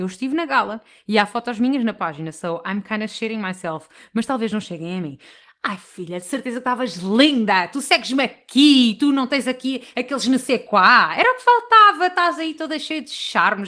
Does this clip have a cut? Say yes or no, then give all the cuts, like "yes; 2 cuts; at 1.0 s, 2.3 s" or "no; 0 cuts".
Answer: no; 0 cuts